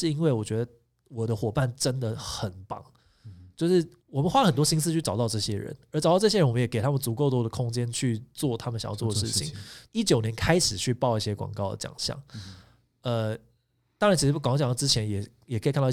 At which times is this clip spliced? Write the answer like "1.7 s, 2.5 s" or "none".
4.0 s, 9.9 s